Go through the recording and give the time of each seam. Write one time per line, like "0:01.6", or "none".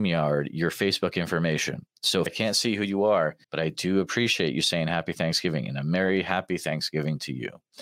0:02.3
0:03.4